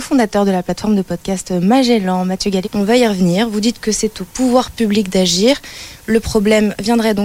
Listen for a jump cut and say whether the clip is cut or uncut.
cut